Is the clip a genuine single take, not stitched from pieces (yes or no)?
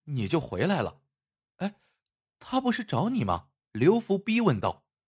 no